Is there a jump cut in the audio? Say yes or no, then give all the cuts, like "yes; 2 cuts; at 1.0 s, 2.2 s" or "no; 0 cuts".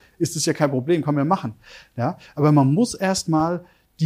no; 0 cuts